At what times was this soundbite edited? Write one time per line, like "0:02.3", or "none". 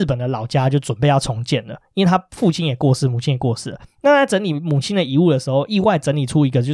none